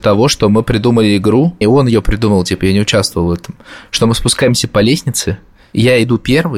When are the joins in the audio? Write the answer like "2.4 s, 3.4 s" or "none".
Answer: 1.6 s